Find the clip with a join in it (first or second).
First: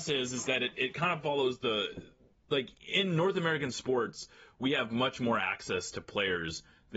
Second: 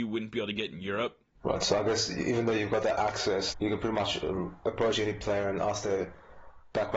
second